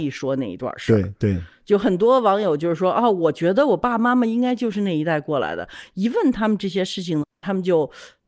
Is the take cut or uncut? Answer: uncut